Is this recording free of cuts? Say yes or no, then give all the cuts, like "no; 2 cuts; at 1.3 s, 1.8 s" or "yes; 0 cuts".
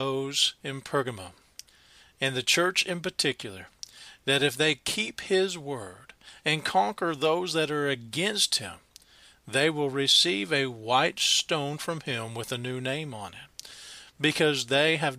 yes; 0 cuts